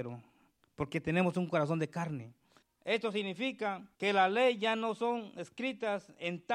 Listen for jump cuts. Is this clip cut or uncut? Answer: cut